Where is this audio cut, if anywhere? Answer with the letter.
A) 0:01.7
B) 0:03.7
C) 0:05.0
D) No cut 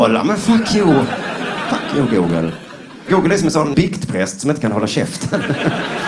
B